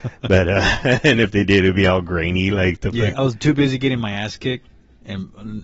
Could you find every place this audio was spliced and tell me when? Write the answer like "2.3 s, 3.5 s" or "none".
3.1 s